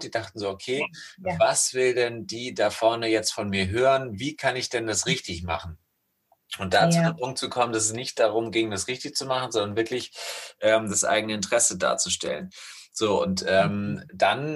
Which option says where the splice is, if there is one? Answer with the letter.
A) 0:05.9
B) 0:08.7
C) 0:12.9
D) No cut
D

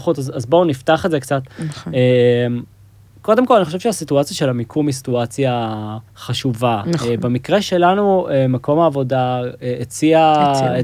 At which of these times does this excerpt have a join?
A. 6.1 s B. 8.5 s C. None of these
A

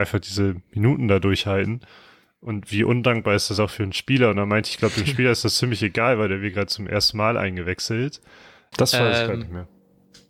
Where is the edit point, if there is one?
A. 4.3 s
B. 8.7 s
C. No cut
B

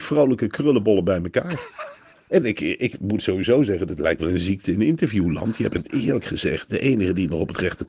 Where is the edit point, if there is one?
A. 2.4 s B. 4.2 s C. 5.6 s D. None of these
D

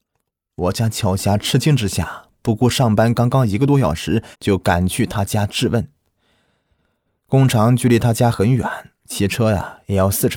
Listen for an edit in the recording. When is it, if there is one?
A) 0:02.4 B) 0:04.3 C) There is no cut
B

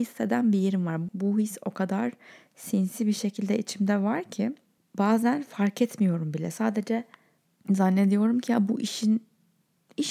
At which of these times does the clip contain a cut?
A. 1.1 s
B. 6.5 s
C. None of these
A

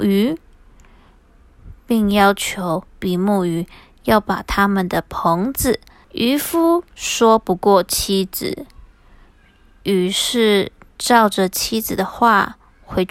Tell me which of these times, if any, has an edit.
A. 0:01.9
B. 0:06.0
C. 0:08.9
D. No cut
B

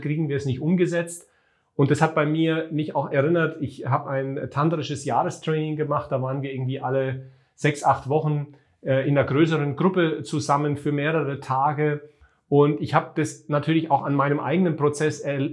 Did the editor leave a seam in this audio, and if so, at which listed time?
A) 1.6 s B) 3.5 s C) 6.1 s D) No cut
D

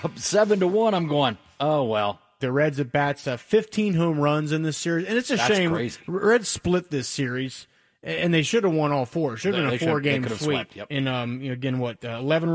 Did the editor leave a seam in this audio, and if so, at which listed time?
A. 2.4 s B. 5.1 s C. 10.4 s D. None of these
A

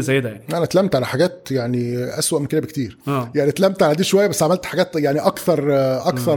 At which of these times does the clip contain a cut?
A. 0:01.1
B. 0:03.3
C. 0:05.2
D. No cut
D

